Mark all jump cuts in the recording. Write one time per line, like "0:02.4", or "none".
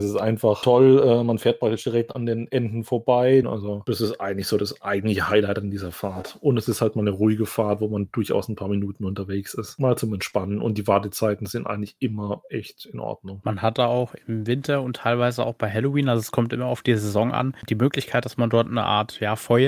0:03.4